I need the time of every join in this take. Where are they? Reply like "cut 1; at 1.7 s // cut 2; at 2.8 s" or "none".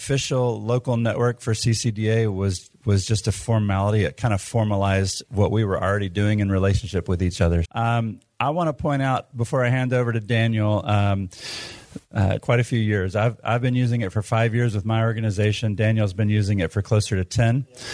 cut 1; at 7.6 s // cut 2; at 12.4 s